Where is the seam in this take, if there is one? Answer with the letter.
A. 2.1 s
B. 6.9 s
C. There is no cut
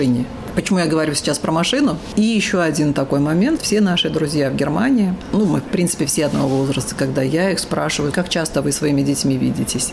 A